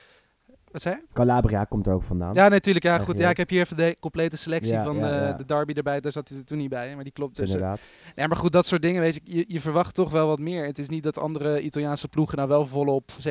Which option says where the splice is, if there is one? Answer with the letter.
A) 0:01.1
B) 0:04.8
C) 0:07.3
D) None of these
C